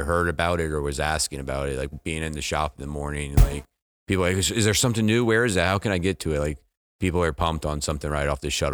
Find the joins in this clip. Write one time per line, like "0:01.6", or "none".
none